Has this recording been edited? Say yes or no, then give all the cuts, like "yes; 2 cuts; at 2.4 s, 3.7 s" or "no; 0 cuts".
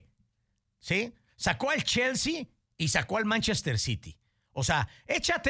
no; 0 cuts